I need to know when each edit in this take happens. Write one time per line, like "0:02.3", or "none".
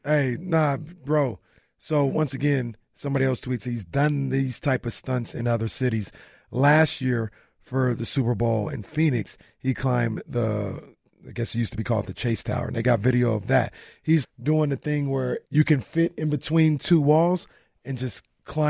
0:14.2
0:15.5